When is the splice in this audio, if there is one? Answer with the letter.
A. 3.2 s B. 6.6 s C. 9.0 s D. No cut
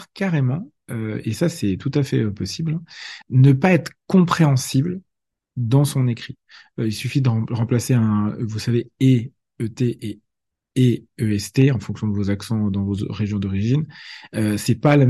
A